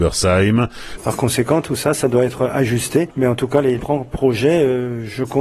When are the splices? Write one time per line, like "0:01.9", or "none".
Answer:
0:01.0